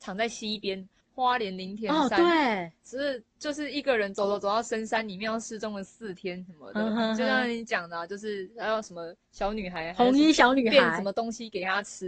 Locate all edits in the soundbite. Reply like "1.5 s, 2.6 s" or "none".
1.0 s